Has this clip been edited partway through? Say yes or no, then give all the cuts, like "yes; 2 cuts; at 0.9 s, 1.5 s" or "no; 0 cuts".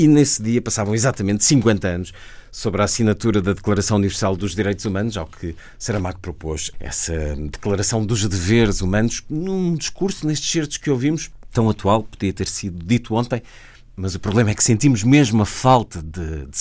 yes; 1 cut; at 6.7 s